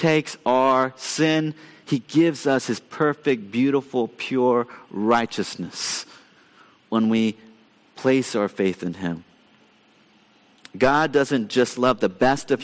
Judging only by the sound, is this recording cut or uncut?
uncut